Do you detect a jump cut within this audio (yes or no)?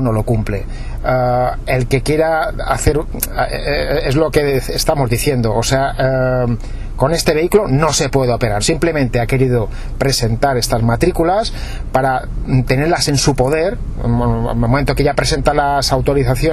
yes